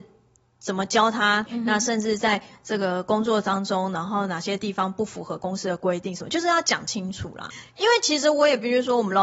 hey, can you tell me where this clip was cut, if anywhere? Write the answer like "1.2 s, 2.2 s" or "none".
1.5 s